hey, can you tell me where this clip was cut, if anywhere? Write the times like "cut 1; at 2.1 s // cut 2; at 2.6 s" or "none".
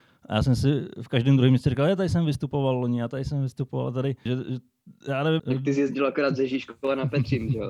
cut 1; at 4.3 s // cut 2; at 5.4 s